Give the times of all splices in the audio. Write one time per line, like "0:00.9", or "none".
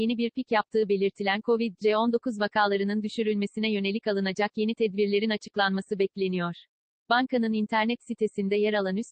0:07.0